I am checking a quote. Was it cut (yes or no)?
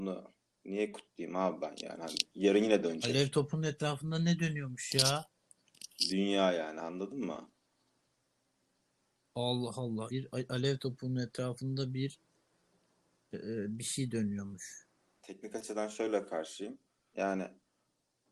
yes